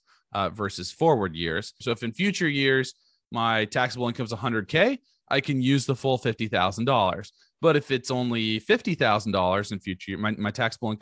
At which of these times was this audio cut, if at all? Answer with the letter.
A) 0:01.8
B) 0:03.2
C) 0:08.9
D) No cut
A